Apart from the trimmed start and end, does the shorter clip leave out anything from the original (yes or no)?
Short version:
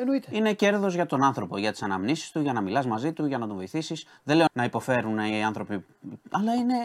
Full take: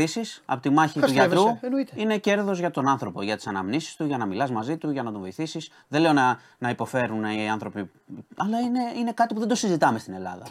yes